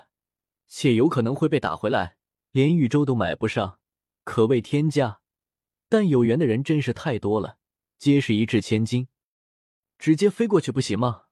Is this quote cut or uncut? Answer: cut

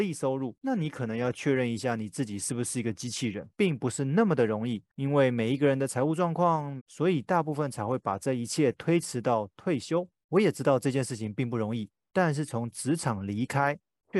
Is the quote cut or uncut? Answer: cut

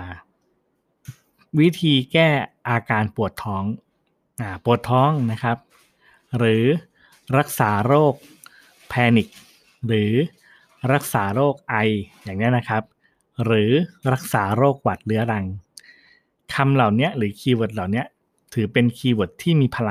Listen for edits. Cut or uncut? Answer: uncut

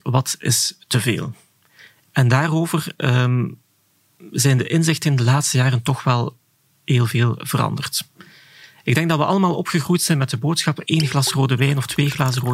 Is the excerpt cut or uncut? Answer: uncut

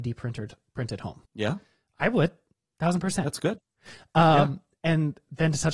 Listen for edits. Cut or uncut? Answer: cut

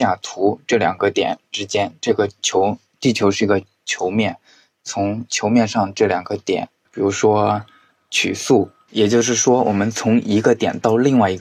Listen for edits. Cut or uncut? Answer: cut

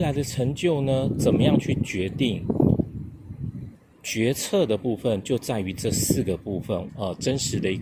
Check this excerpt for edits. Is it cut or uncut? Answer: cut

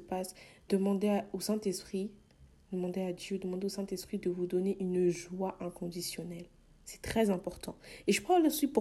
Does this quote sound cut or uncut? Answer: uncut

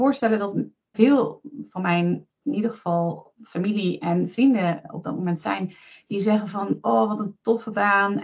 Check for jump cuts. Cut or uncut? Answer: cut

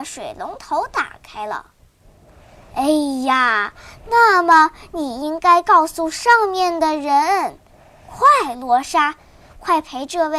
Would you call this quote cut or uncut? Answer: uncut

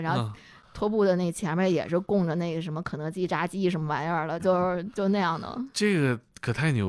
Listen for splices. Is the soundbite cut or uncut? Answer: cut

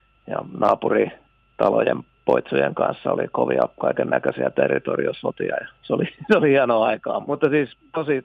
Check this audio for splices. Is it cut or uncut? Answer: cut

